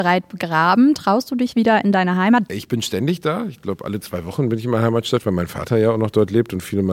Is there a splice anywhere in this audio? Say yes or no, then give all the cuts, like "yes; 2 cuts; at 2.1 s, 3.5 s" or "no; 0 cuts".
yes; 1 cut; at 2.5 s